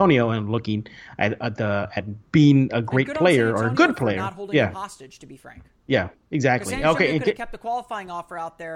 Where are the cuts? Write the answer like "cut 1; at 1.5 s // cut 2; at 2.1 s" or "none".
none